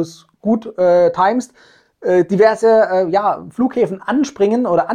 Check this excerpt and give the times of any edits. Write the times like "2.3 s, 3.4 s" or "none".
none